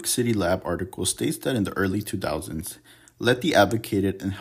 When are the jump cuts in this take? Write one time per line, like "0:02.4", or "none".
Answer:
none